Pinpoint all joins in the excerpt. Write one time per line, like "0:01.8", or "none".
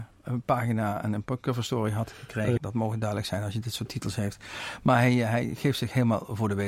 0:02.6